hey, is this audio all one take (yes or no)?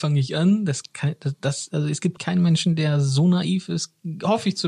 no